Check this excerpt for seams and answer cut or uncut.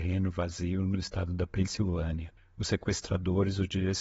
uncut